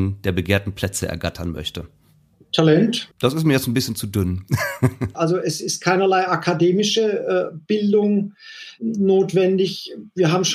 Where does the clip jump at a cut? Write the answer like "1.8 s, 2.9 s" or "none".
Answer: 3.1 s, 5.1 s